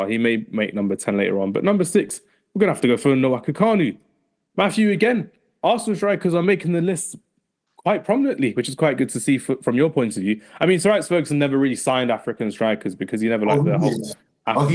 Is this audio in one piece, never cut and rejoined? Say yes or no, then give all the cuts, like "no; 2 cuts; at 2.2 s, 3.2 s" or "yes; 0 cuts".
yes; 0 cuts